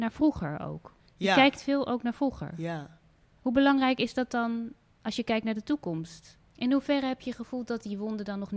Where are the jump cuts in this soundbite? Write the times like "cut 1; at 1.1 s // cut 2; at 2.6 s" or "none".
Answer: cut 1; at 6.4 s